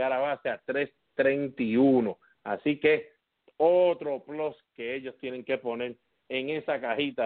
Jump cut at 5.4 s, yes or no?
no